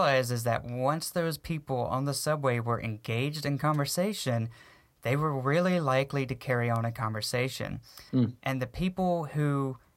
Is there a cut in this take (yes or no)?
yes